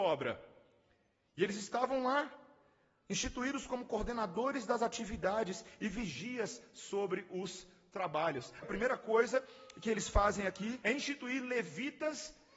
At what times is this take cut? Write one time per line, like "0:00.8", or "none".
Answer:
0:08.6
0:10.8